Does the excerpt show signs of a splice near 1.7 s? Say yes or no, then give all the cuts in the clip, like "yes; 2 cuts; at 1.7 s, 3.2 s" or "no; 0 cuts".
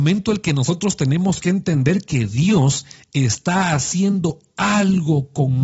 no; 0 cuts